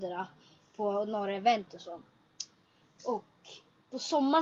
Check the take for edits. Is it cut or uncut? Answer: uncut